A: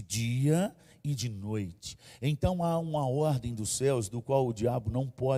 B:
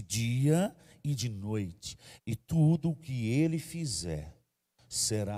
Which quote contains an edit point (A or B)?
B